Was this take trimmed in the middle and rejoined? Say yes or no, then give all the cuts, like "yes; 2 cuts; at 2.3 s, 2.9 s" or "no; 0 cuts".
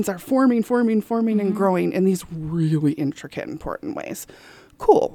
no; 0 cuts